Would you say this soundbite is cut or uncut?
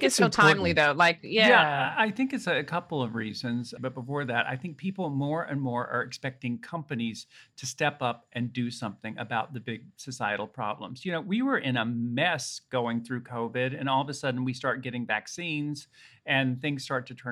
cut